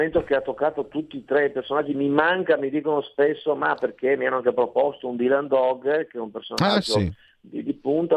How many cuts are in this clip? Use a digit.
0